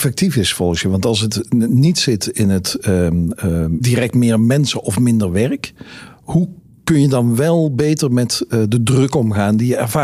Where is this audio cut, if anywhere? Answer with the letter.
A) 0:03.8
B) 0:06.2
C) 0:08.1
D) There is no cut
A